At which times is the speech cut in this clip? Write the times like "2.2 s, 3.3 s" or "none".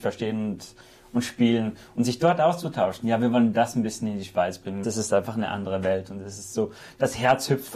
4.8 s